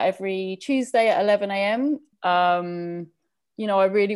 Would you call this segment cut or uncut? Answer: cut